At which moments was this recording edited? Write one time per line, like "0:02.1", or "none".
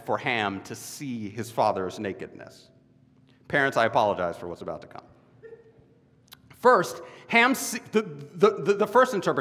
none